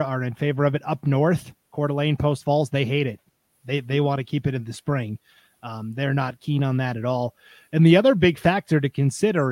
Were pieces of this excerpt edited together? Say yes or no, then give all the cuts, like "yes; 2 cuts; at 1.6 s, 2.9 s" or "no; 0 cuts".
no; 0 cuts